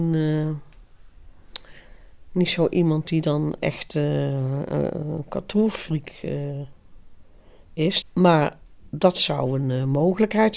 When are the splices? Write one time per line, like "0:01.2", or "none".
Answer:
0:08.0